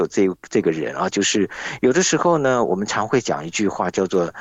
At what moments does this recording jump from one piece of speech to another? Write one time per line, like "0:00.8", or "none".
0:01.1